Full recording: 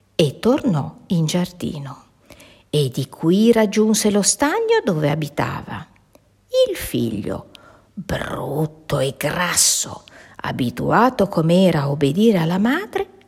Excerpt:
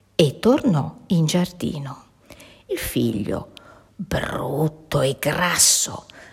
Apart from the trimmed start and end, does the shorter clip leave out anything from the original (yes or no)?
yes